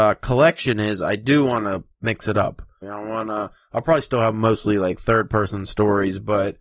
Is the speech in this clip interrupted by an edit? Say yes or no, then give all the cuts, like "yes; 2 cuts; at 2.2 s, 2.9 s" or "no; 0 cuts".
yes; 1 cut; at 2.8 s